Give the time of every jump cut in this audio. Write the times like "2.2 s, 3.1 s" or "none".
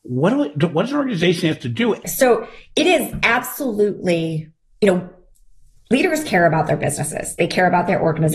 2.0 s